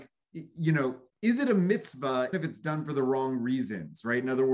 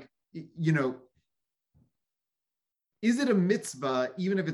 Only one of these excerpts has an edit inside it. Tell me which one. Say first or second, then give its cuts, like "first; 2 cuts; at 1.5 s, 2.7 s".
first; 2 cuts; at 1.1 s, 2.3 s